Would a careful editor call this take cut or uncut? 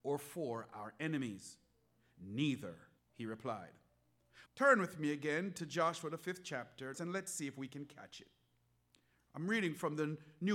cut